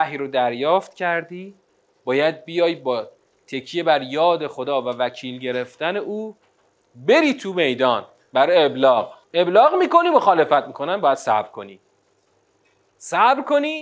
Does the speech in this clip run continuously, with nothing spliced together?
no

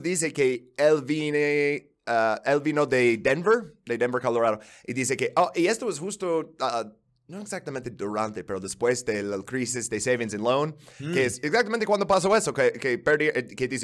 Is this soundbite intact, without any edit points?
yes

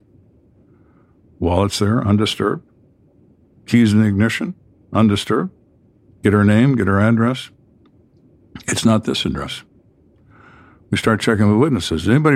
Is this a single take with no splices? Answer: yes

